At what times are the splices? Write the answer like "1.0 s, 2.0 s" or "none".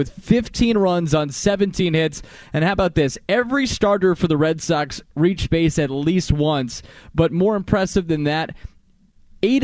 none